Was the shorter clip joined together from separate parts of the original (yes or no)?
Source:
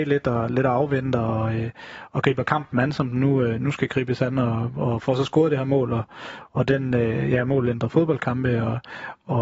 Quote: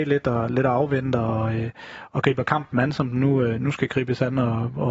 no